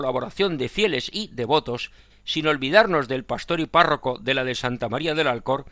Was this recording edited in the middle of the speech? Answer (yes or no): yes